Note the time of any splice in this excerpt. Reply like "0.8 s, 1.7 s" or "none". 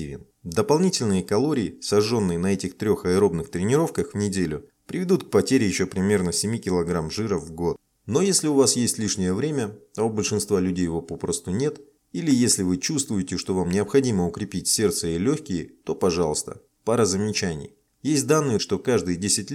16.8 s, 18.6 s